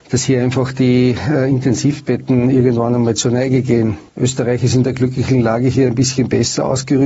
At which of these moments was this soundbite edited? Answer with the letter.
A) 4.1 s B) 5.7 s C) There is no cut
A